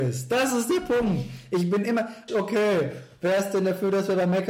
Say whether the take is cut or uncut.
cut